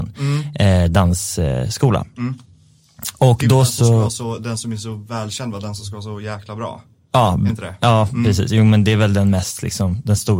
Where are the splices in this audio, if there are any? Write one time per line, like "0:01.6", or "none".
none